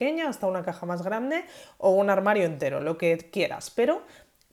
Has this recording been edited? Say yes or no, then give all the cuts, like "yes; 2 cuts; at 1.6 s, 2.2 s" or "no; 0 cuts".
no; 0 cuts